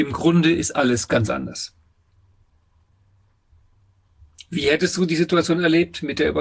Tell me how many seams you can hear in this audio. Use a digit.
0